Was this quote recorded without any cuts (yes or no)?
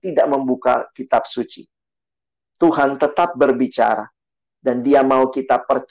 yes